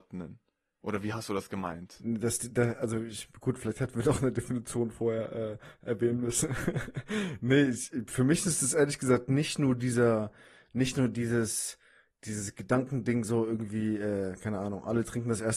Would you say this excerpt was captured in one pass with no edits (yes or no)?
yes